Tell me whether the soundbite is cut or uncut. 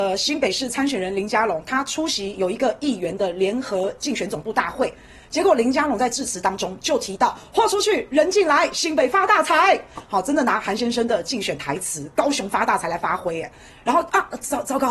uncut